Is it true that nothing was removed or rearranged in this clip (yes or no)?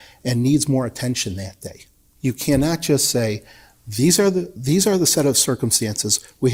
no